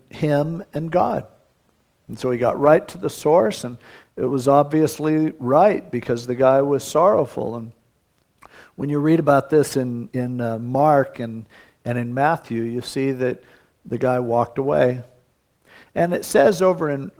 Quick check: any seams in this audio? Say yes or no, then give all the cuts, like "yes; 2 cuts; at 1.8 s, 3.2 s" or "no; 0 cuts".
no; 0 cuts